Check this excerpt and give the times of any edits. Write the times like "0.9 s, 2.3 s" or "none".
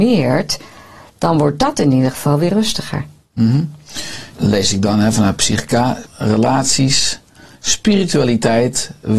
4.3 s, 6.0 s